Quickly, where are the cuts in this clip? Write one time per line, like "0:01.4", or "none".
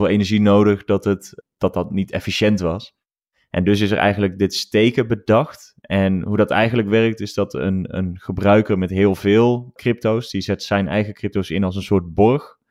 0:09.8